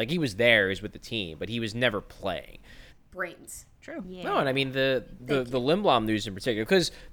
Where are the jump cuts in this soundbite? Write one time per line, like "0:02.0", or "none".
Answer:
0:02.9
0:04.0
0:05.2